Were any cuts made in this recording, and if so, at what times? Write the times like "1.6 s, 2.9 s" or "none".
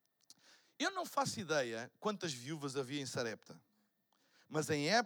none